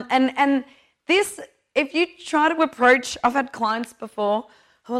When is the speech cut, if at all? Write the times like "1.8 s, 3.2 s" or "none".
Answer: none